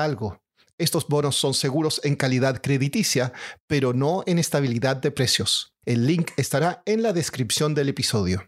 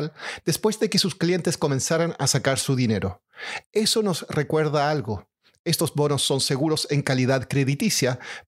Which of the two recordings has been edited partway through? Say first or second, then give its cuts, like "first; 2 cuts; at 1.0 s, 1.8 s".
first; 1 cut; at 5.8 s